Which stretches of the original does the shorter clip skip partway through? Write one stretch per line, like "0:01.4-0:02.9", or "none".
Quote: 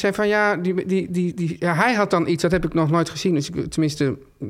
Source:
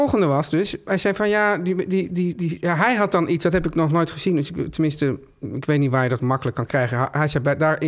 none